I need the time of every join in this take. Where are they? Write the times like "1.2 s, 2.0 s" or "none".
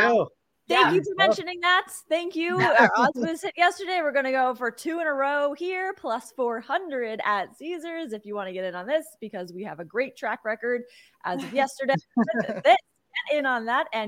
none